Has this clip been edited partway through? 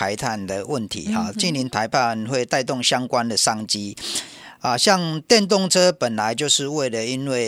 no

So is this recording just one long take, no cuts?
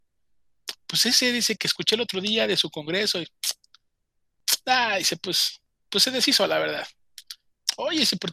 no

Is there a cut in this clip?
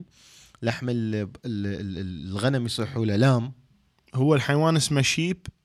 no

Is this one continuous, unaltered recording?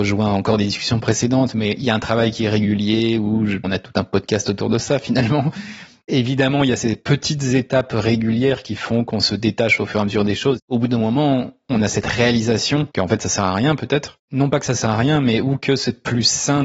no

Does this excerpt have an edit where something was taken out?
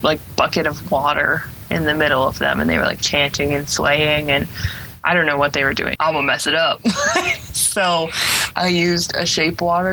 yes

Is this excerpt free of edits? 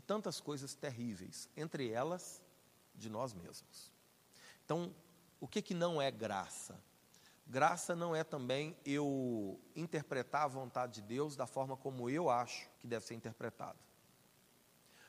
no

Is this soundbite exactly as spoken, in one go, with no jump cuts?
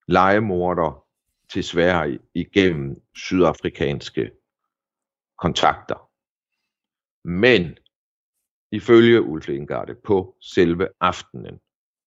yes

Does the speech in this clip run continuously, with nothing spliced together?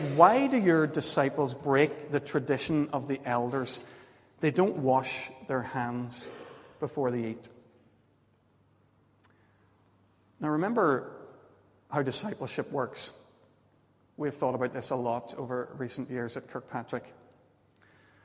yes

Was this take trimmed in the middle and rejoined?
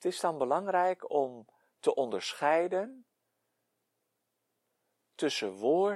no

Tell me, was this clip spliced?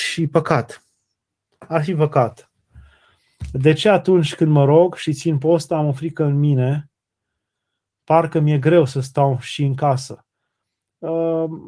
no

